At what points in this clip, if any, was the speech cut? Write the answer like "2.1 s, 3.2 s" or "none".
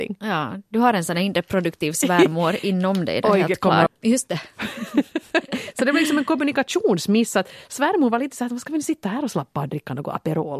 3.9 s